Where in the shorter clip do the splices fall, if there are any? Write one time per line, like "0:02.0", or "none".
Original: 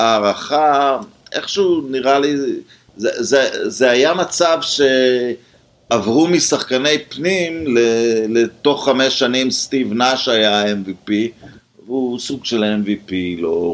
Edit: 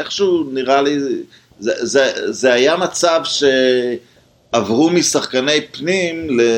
none